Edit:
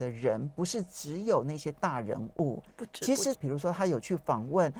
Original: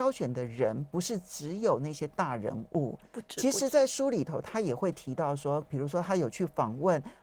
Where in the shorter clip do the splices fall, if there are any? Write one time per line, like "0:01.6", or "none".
0:03.3